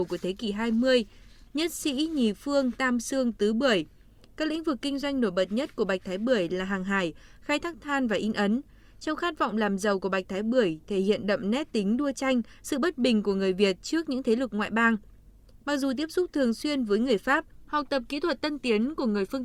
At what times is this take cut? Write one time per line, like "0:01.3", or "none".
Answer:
none